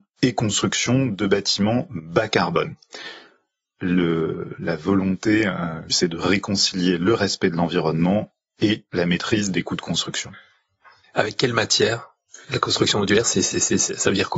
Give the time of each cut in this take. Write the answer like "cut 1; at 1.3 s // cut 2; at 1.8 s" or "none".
cut 1; at 5.9 s